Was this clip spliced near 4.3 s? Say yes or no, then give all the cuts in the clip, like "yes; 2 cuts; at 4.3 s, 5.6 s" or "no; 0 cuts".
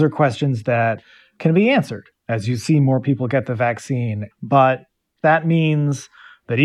yes; 1 cut; at 4.3 s